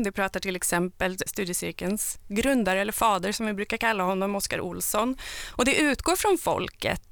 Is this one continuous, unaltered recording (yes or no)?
no